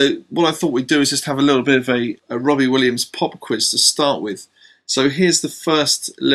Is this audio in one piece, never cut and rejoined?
no; 1 cut; at 2.2 s

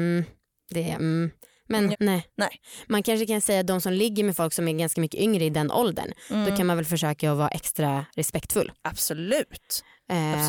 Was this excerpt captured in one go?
no; 1 cut; at 1.9 s

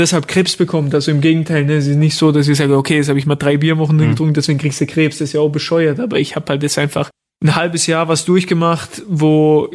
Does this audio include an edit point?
no; 0 cuts

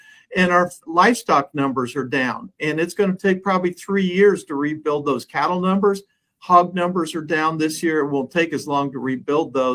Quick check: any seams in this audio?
no; 0 cuts

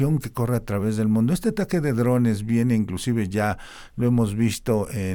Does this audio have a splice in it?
no; 0 cuts

